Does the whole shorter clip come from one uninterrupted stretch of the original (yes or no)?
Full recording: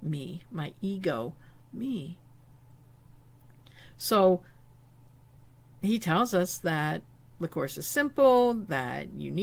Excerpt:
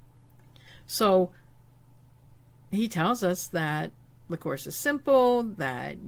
yes